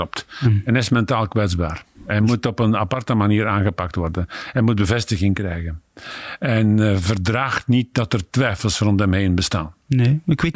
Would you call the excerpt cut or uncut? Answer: cut